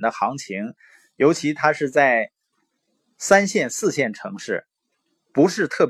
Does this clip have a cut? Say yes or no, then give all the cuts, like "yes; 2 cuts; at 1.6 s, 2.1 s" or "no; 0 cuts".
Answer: no; 0 cuts